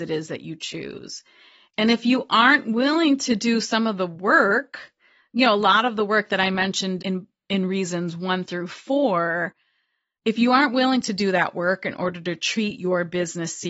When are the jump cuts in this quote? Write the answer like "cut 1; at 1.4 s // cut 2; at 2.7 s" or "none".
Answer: cut 1; at 7.0 s